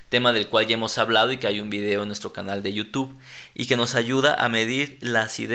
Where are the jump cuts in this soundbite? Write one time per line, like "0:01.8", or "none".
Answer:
none